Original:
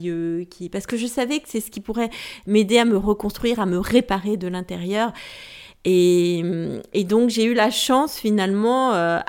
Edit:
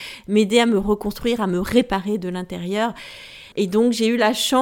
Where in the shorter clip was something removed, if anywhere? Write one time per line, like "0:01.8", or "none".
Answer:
0:03.5

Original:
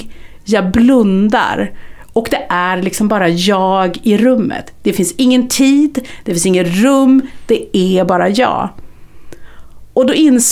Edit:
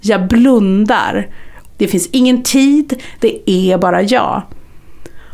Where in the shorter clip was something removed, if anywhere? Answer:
0:01.7
0:03.2

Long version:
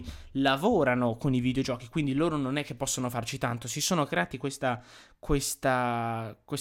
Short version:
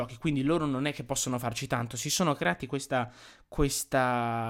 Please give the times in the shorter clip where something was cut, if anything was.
none

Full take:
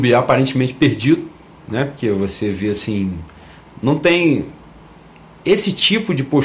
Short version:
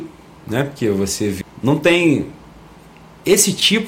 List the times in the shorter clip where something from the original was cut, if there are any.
0:01.4

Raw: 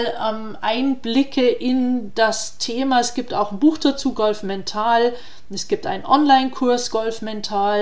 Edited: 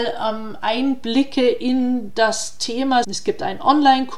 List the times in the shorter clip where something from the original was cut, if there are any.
0:03.0

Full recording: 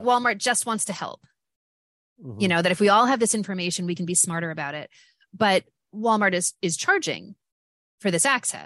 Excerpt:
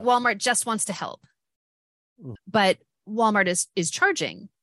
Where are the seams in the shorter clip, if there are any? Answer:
0:02.4

